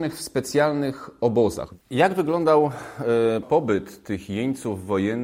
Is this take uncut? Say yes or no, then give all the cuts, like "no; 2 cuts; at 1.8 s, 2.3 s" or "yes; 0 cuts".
no; 1 cut; at 3.4 s